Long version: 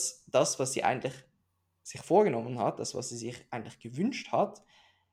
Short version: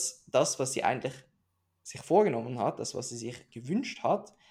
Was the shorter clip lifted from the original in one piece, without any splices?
no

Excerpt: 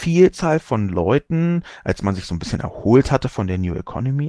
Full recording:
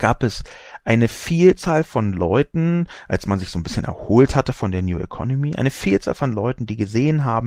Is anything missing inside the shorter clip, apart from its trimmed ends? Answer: no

